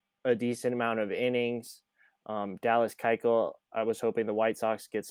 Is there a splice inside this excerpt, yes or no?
no